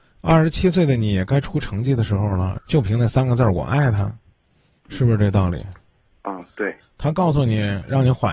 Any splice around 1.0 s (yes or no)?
no